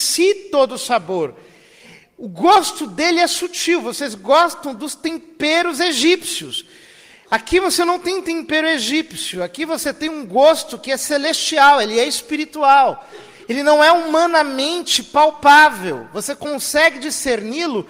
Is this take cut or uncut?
uncut